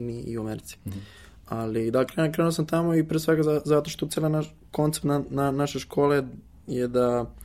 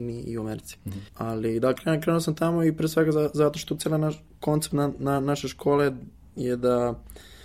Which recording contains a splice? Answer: second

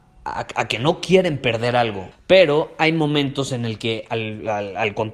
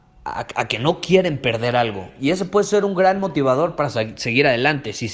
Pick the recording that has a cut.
first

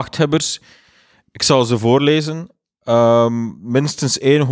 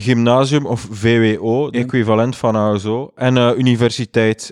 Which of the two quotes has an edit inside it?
second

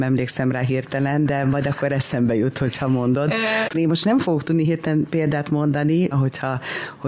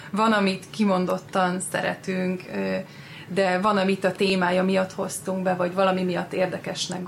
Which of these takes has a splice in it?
first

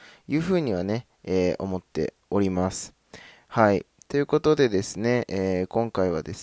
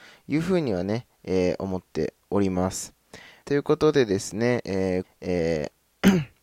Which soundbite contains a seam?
second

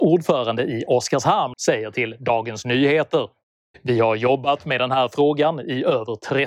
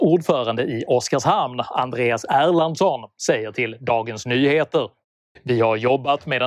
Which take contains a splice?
first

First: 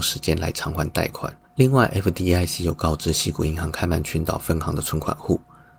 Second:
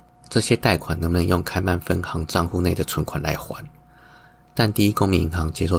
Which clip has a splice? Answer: first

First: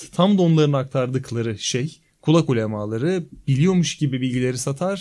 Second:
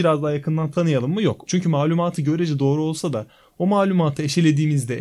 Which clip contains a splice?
second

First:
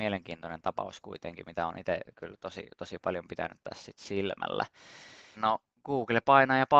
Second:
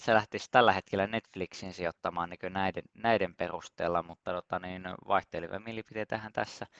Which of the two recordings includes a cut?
first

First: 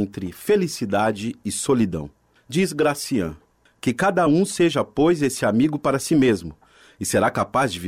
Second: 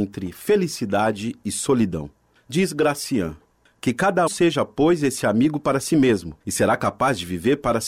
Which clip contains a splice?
second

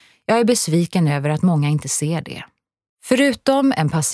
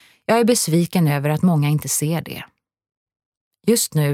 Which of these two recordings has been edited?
first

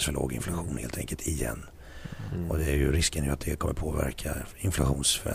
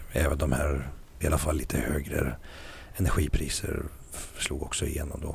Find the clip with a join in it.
second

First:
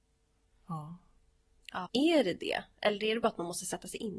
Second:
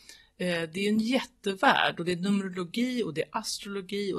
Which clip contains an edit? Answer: first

